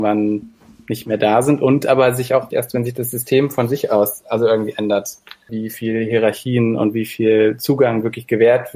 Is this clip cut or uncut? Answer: cut